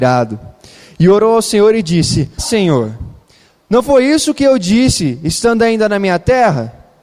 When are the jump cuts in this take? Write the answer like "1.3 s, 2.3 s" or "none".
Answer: 2.4 s